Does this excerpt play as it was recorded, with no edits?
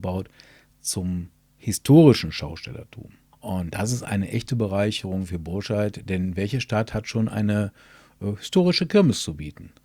no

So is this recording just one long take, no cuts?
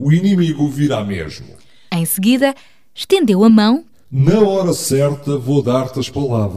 no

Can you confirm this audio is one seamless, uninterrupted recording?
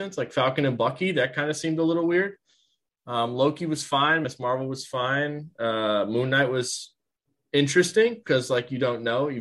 yes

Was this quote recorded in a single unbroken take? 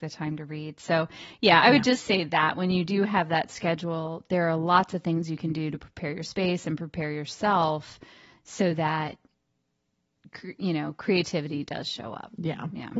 yes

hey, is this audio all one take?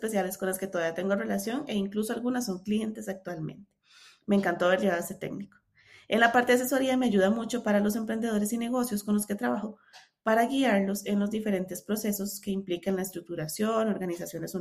yes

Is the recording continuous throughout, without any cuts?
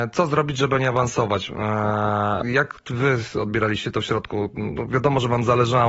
no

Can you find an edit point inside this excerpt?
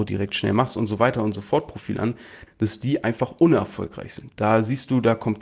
yes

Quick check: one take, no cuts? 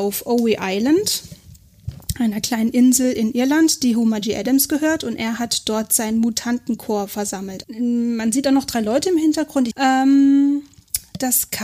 no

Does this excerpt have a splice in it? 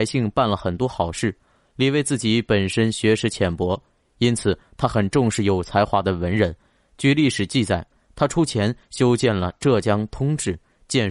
no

